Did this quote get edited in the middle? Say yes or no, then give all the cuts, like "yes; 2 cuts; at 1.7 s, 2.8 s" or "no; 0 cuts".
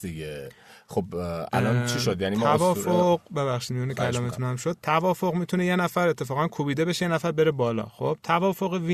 no; 0 cuts